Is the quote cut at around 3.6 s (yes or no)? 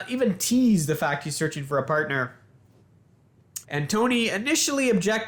yes